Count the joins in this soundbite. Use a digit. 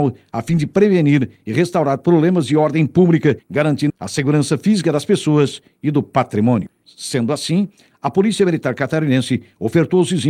2